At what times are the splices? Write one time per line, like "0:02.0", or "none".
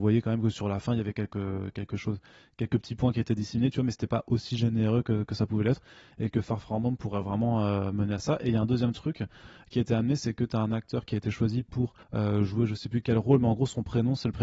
0:12.0